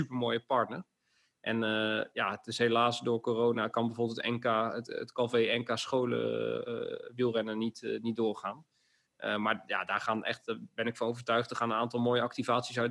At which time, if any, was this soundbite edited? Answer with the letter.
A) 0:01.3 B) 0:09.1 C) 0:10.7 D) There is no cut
D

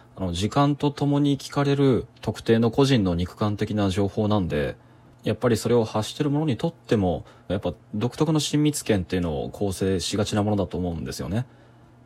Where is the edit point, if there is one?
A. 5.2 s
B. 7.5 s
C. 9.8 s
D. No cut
B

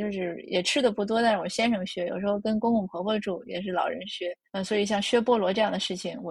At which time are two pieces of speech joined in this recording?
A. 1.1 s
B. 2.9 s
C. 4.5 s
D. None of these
C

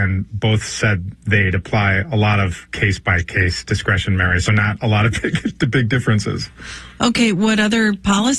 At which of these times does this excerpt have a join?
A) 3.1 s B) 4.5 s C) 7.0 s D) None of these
D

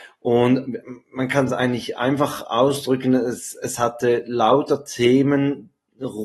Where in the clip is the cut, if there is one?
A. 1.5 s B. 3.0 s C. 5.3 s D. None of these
D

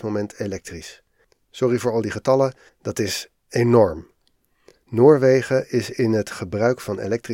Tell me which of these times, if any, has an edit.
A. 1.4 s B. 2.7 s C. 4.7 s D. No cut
B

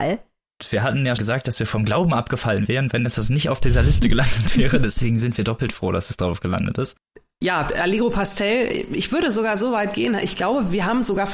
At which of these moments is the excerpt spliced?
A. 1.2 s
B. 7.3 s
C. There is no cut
A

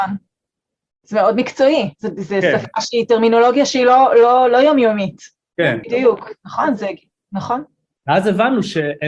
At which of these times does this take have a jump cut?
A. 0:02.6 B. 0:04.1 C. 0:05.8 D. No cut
C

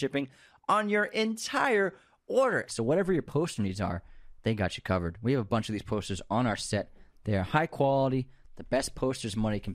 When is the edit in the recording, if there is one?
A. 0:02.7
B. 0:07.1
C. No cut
A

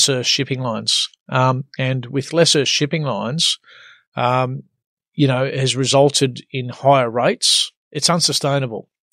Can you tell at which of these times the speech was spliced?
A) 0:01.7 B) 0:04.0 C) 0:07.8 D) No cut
C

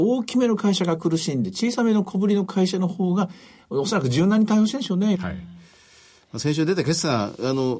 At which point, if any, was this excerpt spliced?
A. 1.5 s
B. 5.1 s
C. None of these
B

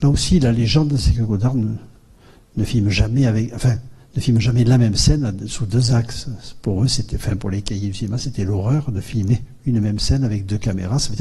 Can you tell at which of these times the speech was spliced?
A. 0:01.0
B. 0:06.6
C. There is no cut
C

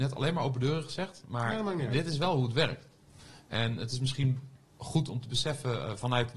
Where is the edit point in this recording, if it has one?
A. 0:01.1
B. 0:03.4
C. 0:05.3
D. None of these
D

